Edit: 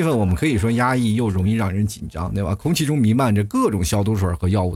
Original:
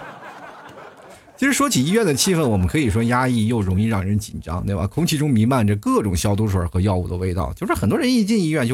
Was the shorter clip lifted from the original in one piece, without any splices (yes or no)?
yes